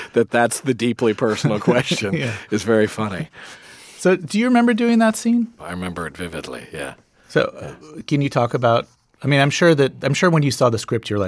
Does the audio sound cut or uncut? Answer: cut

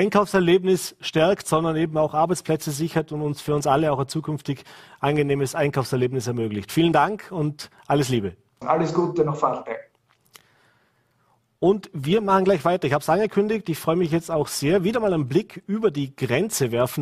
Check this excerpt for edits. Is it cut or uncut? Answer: cut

